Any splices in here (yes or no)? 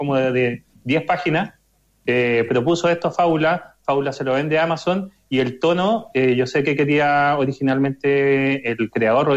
no